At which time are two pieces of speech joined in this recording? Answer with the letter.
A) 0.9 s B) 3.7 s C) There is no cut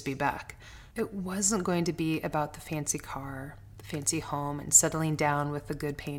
A